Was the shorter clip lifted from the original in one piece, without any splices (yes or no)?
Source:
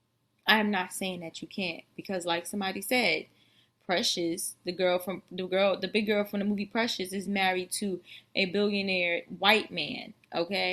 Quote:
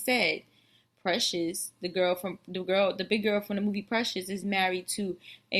yes